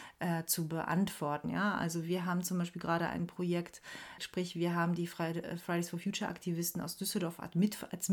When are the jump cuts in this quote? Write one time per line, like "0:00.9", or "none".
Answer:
0:01.4
0:04.2